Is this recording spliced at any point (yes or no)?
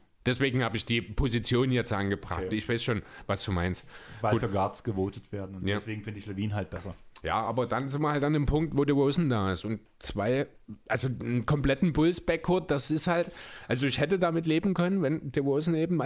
no